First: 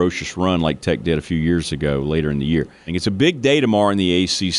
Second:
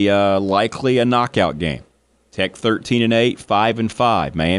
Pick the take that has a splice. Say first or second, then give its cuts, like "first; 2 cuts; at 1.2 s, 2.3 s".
first; 1 cut; at 2.9 s